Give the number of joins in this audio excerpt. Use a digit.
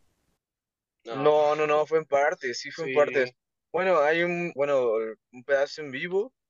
1